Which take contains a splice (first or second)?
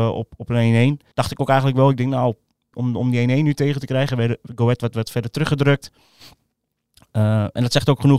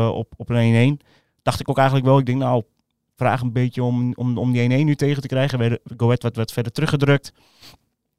first